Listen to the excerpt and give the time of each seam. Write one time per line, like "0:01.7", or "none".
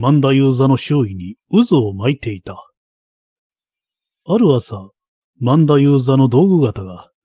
0:04.3